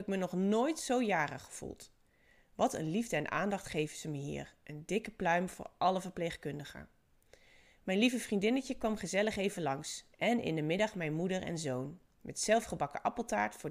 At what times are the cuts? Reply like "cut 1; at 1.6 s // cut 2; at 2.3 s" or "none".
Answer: cut 1; at 10.1 s